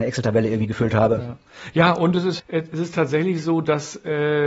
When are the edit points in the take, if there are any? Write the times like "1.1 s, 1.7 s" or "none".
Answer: 2.4 s